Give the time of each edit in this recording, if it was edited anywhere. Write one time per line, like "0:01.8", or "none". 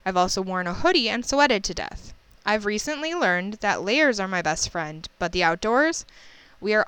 none